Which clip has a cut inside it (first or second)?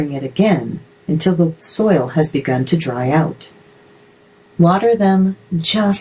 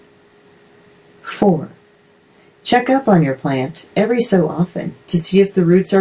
first